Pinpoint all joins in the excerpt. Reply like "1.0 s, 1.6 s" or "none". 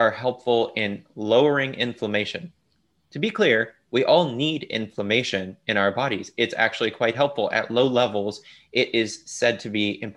none

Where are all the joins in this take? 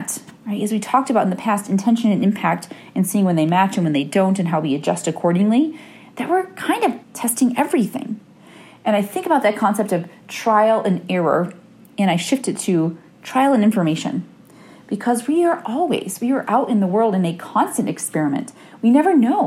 7.0 s

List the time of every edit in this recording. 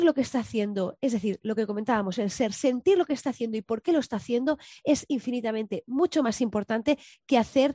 none

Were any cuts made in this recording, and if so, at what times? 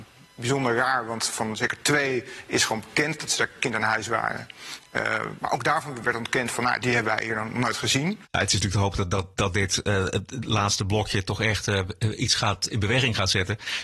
6.8 s, 8.2 s

